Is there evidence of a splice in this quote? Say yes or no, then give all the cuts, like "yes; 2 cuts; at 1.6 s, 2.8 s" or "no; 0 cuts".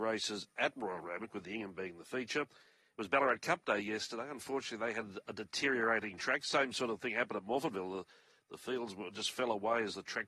no; 0 cuts